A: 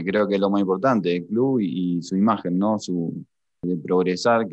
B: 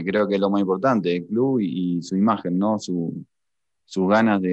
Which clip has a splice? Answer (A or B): A